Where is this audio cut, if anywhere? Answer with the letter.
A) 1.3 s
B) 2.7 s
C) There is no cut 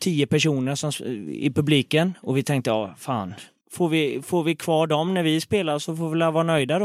C